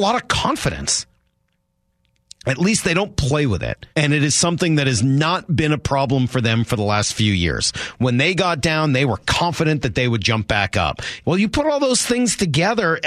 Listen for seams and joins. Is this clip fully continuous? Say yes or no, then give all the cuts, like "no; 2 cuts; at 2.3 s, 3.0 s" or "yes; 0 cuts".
no; 2 cuts; at 3.9 s, 11.2 s